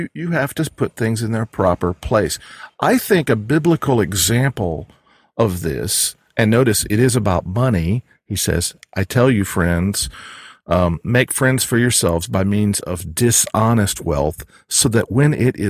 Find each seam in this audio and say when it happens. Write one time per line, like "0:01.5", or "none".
none

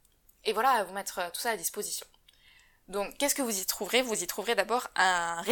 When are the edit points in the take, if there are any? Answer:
none

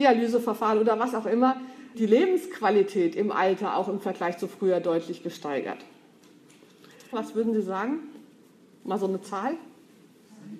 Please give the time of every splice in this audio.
0:01.9
0:07.1

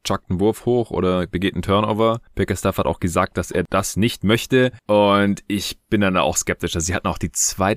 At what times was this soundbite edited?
none

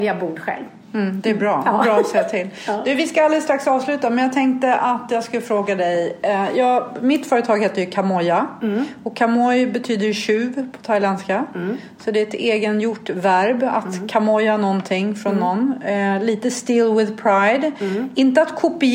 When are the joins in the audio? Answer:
none

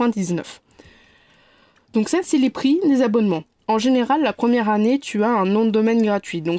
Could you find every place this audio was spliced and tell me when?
none

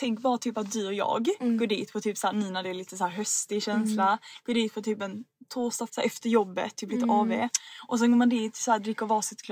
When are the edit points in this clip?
0:05.9

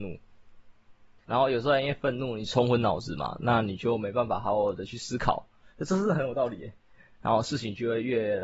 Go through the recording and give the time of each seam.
0:01.2
0:05.7
0:07.1

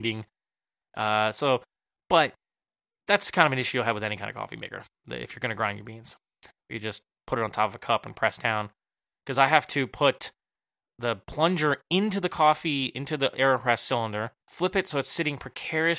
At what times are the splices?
0:06.6
0:14.4

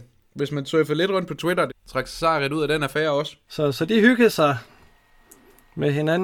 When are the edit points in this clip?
0:01.7
0:03.5

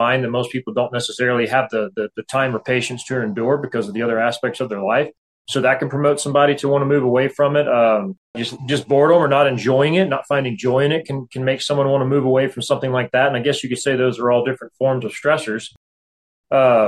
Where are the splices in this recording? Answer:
0:08.3

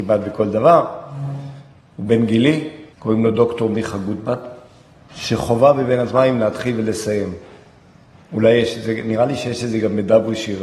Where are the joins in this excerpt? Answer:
0:02.9
0:05.1

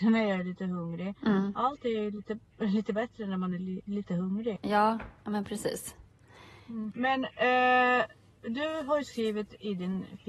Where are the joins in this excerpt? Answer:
0:04.6
0:06.9

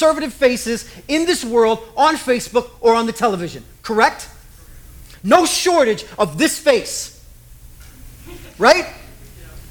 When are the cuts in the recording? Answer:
none

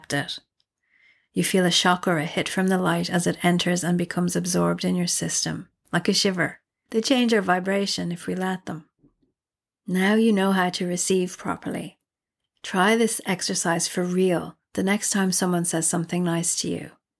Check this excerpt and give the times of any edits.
0:06.9

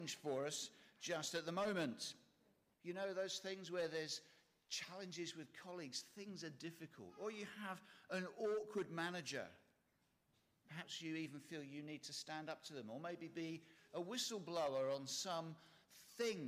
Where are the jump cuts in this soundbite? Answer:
0:02.7

